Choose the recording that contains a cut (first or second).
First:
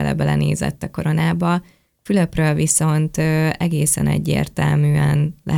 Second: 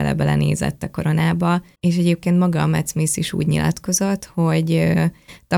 second